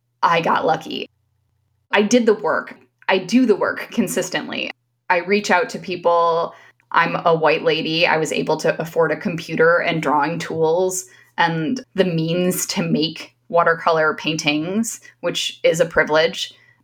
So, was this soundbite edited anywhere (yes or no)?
yes